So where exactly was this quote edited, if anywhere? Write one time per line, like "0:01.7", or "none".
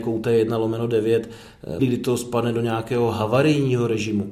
0:01.8

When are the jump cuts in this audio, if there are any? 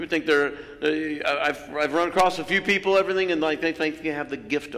none

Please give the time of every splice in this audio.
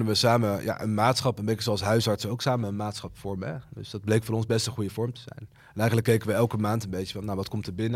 none

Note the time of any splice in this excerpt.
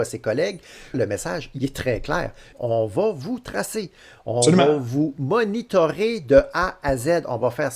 0:00.9
0:02.5

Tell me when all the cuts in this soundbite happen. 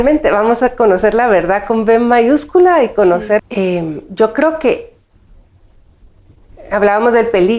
0:03.4

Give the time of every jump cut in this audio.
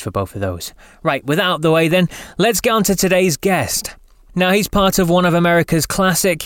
none

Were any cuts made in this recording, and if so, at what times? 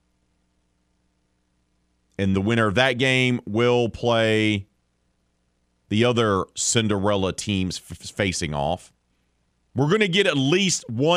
0:02.3

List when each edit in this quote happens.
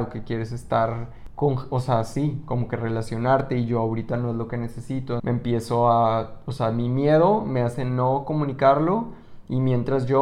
0:05.2

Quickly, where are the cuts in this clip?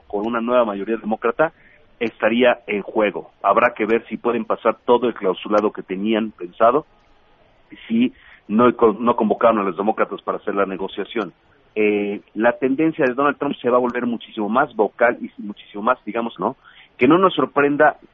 0:12.2
0:16.4

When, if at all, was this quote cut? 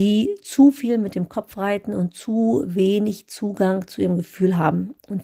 none

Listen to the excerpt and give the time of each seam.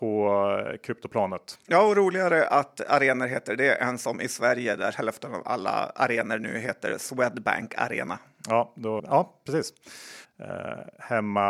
0:09.0
0:10.2

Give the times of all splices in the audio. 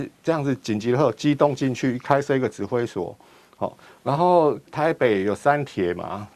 0:04.7

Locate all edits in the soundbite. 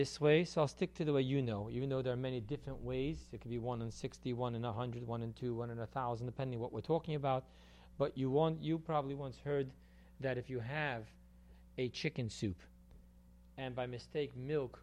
none

